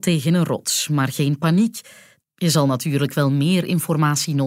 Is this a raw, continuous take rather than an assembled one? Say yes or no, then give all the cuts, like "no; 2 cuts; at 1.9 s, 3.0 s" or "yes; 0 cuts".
no; 1 cut; at 2.2 s